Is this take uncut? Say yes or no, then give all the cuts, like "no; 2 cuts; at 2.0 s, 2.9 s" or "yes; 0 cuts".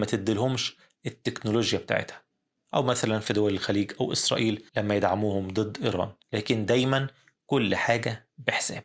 no; 2 cuts; at 4.7 s, 6.2 s